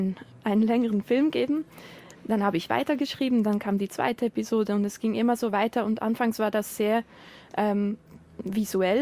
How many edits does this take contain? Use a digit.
0